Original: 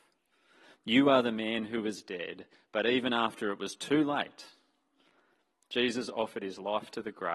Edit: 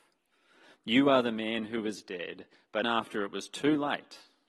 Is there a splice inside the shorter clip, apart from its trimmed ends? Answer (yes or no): yes